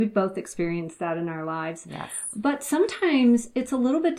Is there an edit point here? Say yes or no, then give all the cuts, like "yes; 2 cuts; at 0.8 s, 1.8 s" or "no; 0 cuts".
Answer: no; 0 cuts